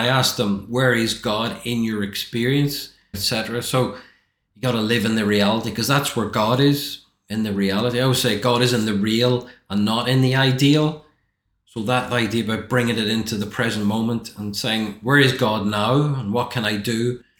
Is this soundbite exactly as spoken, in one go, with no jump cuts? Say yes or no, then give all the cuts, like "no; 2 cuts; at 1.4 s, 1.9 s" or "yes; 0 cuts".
no; 1 cut; at 3.1 s